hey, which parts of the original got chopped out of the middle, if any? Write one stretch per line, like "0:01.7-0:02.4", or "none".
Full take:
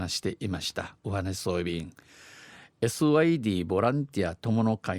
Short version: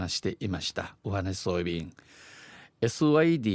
none